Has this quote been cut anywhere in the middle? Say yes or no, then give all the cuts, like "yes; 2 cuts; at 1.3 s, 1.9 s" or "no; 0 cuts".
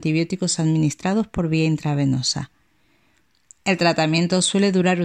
no; 0 cuts